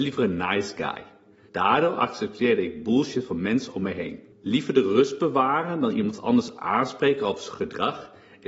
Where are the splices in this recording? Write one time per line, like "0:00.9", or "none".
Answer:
0:01.5
0:04.3